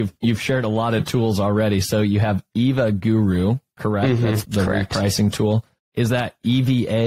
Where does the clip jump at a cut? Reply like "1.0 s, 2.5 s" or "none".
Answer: 4.4 s